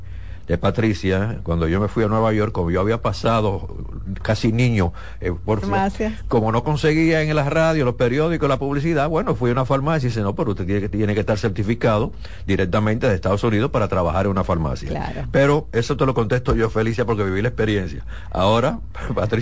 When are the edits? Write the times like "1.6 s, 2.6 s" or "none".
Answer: 5.6 s